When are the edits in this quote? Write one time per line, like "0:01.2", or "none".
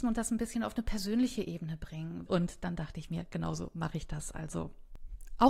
0:02.3